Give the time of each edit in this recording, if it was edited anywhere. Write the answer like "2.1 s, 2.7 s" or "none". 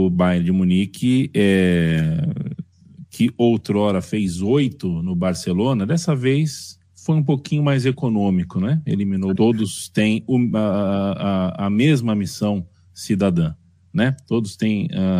9.4 s